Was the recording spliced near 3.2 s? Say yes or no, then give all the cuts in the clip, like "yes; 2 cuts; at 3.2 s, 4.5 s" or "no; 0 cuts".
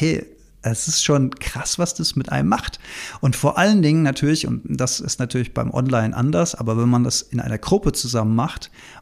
no; 0 cuts